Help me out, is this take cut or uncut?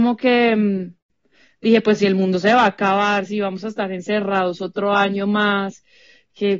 uncut